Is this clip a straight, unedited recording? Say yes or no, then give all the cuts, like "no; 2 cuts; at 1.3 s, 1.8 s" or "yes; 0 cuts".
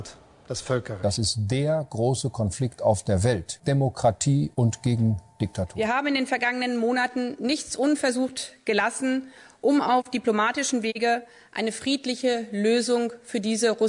no; 1 cut; at 3.6 s